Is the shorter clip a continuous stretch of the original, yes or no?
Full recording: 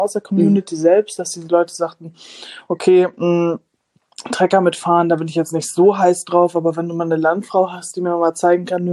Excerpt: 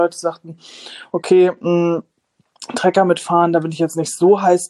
yes